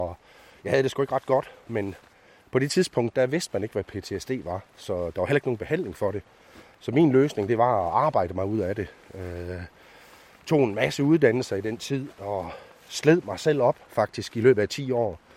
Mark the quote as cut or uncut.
uncut